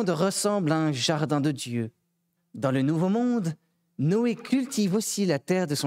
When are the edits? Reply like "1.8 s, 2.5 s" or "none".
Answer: 2.4 s